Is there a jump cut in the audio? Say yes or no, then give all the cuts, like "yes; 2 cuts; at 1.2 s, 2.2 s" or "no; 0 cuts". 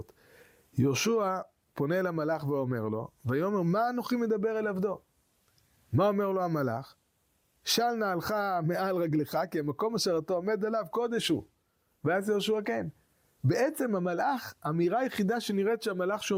no; 0 cuts